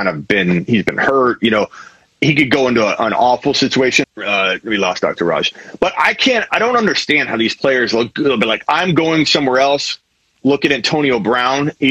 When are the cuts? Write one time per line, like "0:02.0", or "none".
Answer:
0:04.0

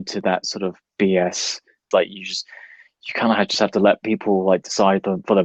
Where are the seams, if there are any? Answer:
0:01.9

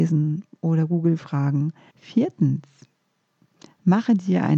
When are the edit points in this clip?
0:01.9

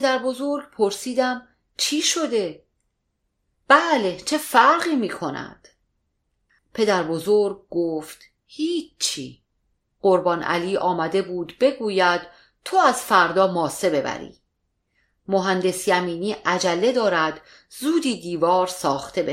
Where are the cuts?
0:03.6
0:06.6

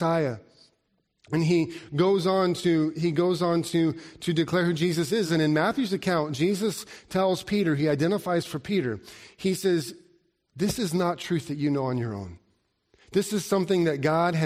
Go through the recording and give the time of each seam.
none

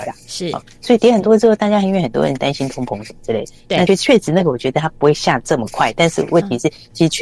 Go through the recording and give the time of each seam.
0:03.9

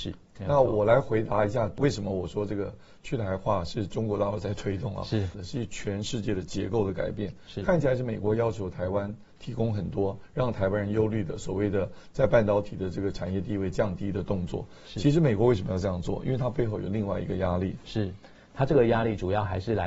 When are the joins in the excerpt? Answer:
0:05.3

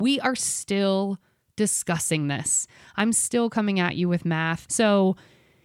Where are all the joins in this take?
0:04.7

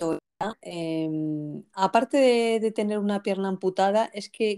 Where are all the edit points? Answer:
0:01.7

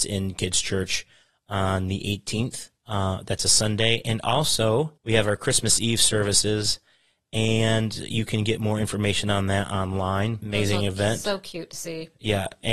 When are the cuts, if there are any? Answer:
0:02.8
0:05.0
0:10.4

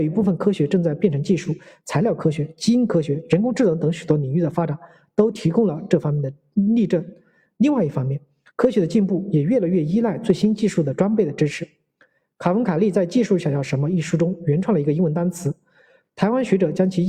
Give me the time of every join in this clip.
0:07.5

